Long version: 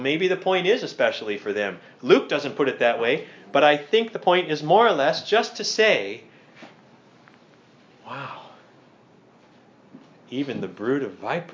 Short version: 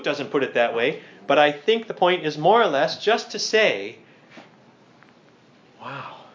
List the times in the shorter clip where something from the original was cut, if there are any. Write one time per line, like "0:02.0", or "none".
none